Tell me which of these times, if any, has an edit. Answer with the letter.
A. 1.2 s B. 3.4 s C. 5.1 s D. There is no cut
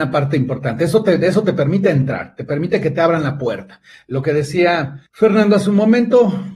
C